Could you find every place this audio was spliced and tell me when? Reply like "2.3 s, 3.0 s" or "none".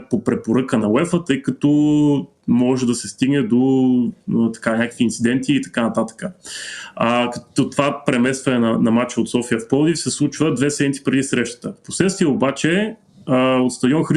none